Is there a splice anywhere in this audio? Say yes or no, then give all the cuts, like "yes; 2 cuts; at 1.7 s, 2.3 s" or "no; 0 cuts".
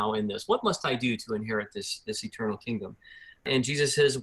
no; 0 cuts